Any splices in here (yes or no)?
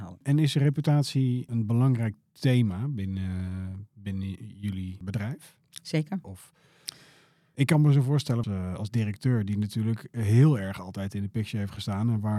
yes